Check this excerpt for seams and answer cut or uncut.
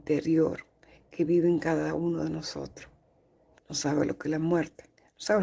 cut